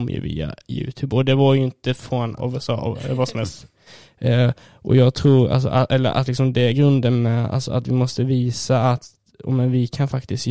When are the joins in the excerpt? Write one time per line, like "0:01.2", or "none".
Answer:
0:02.4